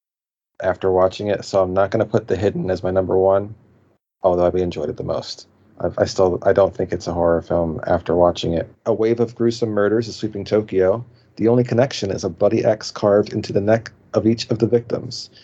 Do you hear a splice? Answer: yes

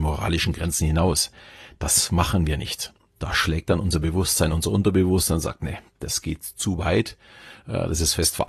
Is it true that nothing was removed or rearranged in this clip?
yes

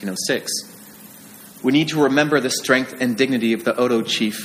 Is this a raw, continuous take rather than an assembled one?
no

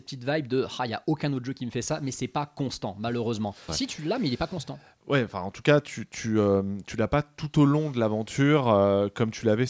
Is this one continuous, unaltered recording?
no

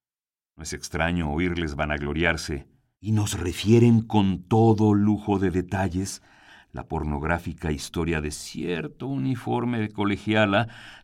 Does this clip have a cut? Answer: yes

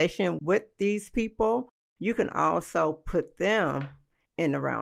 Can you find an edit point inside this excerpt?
no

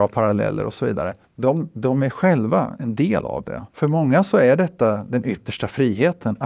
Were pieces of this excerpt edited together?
yes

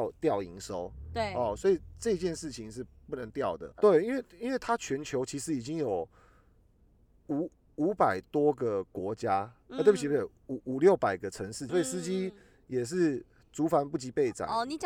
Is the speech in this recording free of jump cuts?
no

